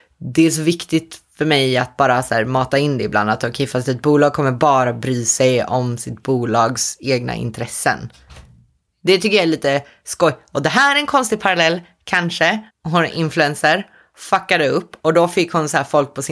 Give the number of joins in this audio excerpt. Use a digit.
1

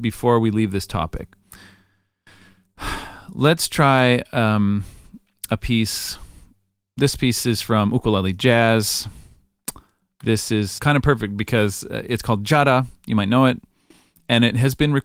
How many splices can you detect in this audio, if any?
1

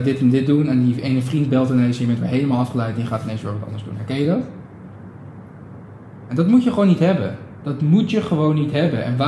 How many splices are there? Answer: 0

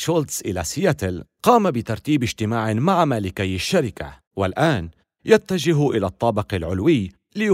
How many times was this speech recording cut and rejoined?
1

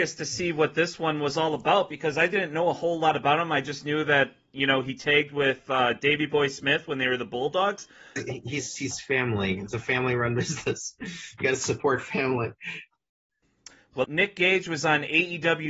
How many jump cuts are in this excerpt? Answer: 2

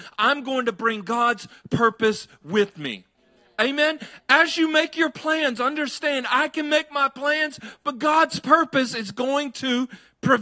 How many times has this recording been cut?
0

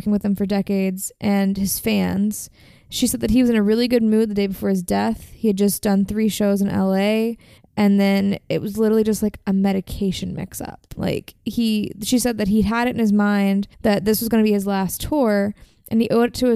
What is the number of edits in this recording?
3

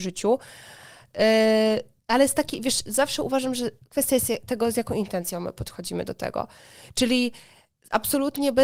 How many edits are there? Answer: 0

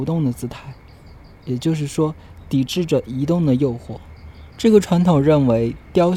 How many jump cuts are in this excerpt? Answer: 1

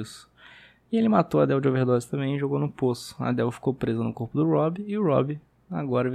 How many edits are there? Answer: 0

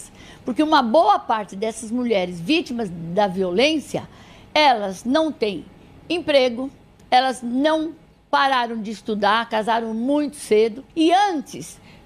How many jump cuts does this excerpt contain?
1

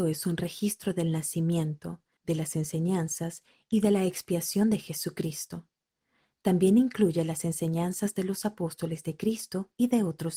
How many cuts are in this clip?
1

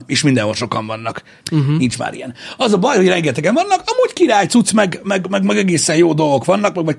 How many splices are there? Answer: 1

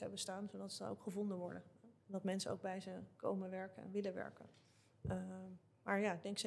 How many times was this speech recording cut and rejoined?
1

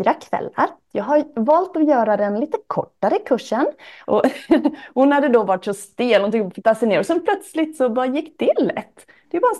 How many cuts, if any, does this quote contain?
2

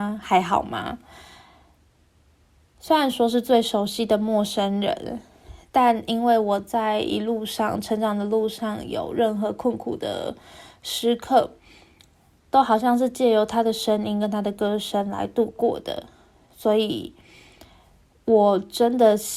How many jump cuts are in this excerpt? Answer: 0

